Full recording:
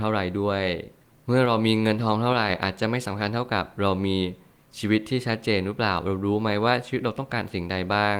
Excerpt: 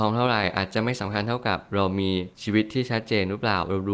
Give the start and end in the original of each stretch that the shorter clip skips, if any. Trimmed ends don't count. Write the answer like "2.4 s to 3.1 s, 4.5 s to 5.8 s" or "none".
4.4 s to 4.7 s